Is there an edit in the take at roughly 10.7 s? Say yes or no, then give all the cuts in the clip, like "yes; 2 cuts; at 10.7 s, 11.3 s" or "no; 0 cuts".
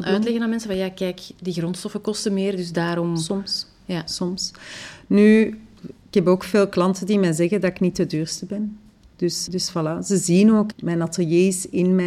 yes; 2 cuts; at 9.5 s, 10.7 s